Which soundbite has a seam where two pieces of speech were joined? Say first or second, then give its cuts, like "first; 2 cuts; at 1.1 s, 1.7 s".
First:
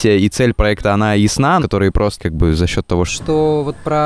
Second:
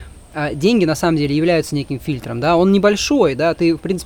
first; 2 cuts; at 1.6 s, 3.1 s